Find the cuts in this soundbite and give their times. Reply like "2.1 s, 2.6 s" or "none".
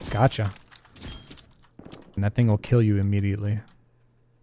2.2 s